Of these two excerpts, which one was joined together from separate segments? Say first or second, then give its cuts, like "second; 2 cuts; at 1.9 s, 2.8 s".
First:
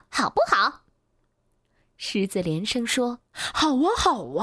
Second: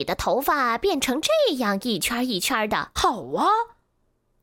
second; 1 cut; at 3.0 s